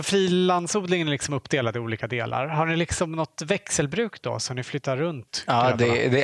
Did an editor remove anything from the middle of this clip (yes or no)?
no